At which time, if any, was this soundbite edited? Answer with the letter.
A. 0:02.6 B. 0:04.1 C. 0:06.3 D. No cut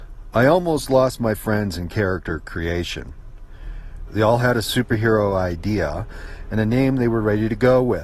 B